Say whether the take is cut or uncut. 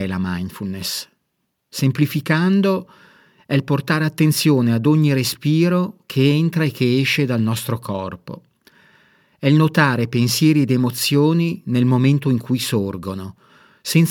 uncut